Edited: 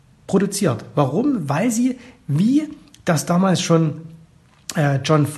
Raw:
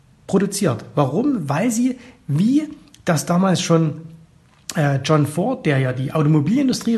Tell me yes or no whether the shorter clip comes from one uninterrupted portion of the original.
yes